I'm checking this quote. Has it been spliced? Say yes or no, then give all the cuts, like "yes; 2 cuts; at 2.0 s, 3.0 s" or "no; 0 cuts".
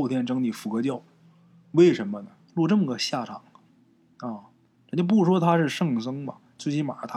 yes; 1 cut; at 2.5 s